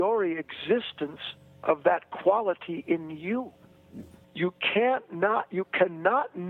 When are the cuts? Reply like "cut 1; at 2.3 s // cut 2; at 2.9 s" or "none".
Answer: cut 1; at 4.2 s